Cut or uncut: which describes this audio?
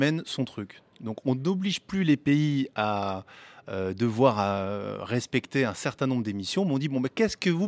uncut